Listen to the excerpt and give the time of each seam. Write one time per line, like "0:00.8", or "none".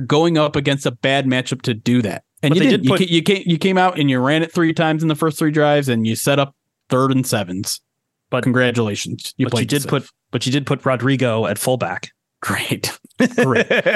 0:02.3
0:03.9